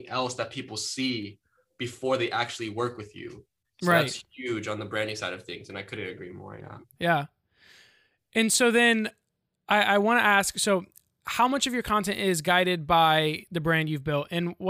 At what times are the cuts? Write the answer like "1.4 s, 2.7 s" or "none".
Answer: 7.0 s